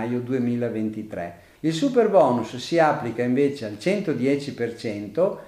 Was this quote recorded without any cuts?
no; 1 cut; at 1.5 s

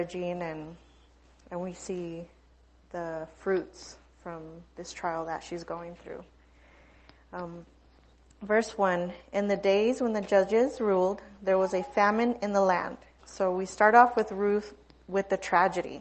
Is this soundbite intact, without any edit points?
no; 1 cut; at 13.2 s

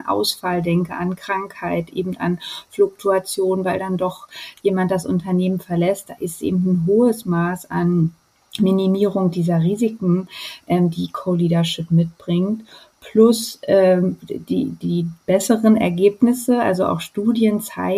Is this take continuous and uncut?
yes; 0 cuts

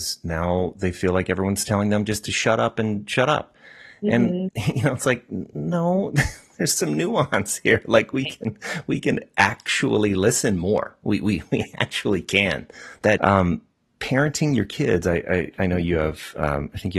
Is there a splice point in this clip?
yes; 1 cut; at 13.2 s

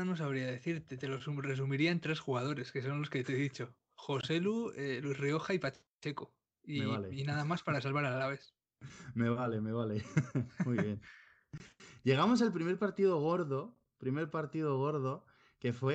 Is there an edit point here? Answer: no; 0 cuts

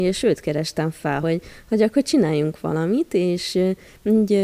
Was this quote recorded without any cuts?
yes; 0 cuts

